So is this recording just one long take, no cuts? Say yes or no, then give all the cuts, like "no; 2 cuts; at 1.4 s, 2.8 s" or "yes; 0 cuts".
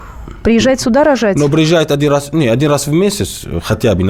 yes; 0 cuts